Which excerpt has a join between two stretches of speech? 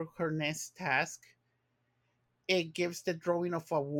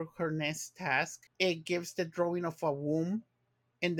second; 1 cut; at 1.3 s

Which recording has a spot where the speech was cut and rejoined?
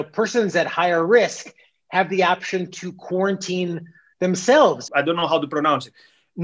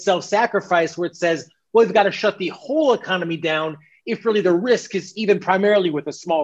first; 1 cut; at 4.9 s

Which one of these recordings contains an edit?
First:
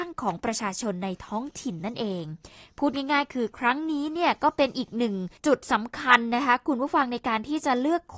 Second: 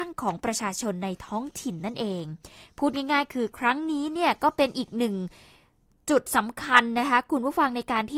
first; 1 cut; at 5.4 s

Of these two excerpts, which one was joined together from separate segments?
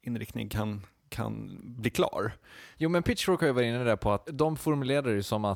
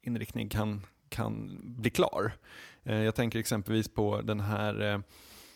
first; 2 cuts; at 2.7 s, 4.3 s

